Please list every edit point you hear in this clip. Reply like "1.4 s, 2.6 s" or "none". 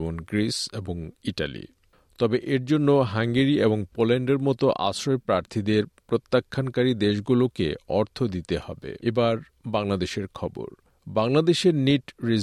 9.0 s